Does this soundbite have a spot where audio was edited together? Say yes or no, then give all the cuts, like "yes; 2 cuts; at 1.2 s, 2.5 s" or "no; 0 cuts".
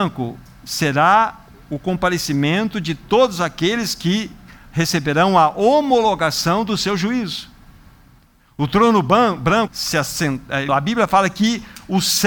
yes; 2 cuts; at 9.7 s, 10.7 s